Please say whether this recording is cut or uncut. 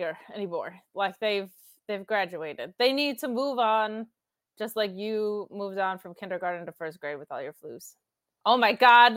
uncut